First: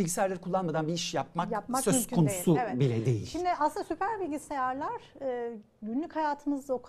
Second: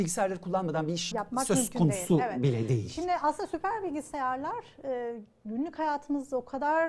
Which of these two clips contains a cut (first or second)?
second